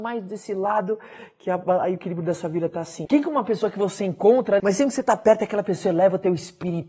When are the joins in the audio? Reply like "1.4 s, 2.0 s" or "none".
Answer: 3.1 s, 4.6 s